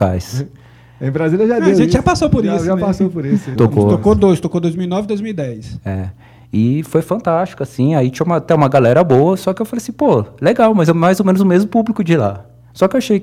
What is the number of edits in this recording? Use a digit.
1